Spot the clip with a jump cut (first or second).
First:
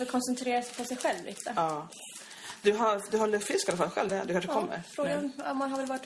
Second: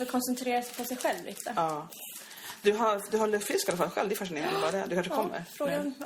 first